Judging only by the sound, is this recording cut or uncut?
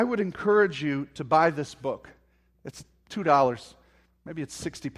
uncut